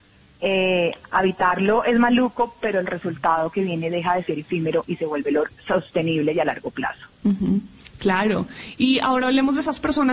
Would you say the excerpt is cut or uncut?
cut